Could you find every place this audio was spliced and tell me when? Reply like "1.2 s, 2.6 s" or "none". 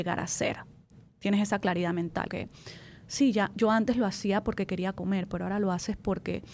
2.3 s